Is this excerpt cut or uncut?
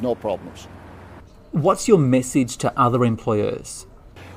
uncut